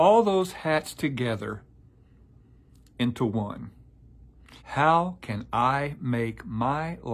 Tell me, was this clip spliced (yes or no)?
yes